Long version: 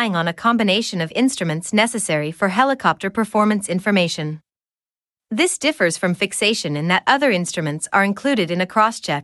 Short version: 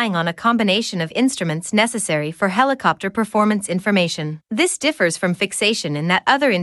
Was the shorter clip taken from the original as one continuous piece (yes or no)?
no